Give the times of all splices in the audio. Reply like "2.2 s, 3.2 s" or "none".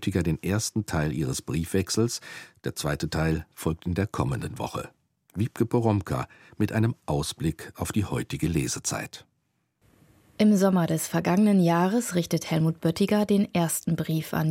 none